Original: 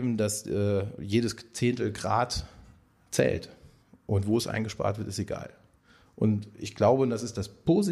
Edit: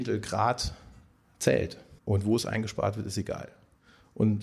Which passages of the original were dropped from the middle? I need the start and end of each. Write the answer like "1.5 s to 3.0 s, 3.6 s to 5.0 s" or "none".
3.7 s to 4.0 s

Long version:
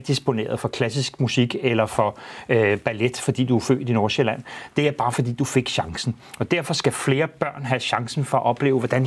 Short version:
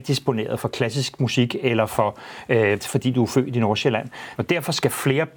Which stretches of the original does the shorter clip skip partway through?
2.8 s to 3.1 s, 4.7 s to 6.4 s

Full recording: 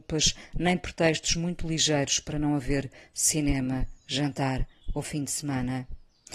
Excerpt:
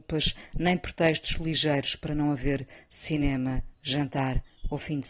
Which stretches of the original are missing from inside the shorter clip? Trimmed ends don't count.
1.3 s to 1.6 s

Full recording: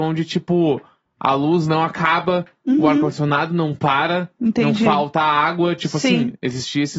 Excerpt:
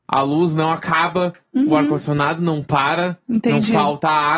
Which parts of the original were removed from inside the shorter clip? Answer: none

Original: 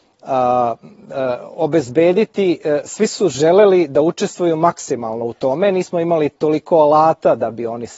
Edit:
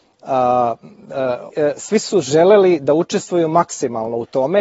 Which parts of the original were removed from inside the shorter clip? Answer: 1.5 s to 2.6 s

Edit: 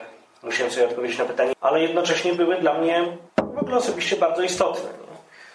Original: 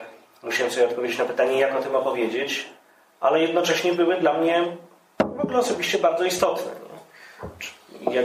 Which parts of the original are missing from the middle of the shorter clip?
1.5 s to 3.1 s, 4.9 s to 5.1 s

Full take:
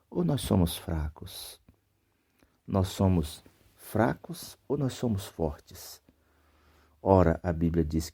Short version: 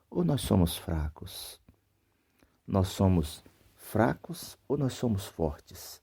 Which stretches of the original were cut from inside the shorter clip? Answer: none

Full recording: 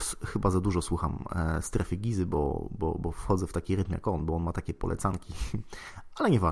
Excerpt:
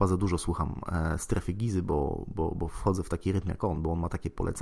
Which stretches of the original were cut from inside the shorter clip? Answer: none

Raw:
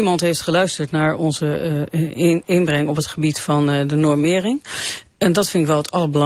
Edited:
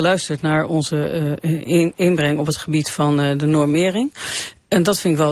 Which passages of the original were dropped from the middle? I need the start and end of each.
none

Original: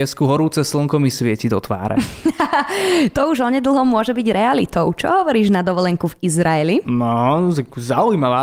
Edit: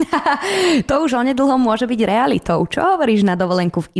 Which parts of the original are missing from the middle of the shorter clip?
none

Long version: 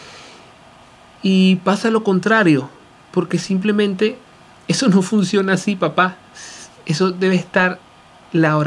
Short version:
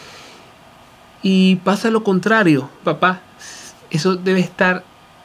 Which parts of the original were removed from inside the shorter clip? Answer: 2.8 s to 5.8 s

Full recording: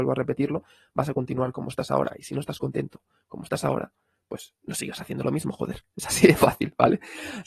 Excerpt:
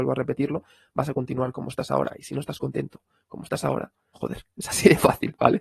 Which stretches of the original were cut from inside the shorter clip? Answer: 4.1 s to 5.5 s

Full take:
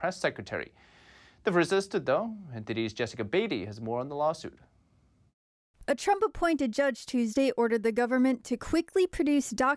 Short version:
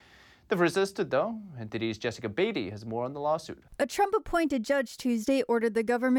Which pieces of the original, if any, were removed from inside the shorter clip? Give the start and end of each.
4.6 s to 5.8 s

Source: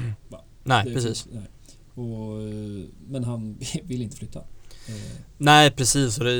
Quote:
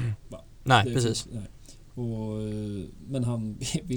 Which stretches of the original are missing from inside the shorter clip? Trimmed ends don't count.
none

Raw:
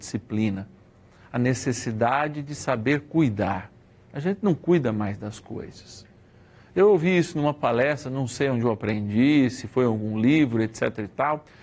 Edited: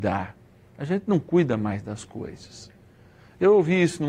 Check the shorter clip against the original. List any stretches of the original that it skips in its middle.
none

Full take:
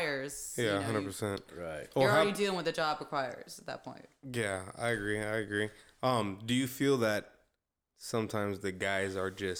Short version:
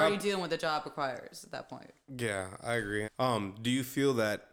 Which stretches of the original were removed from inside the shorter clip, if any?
5.2 s to 5.9 s

